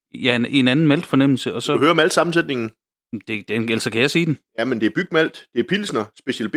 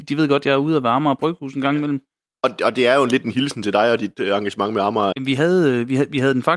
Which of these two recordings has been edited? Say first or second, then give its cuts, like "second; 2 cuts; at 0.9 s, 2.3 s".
second; 1 cut; at 5.1 s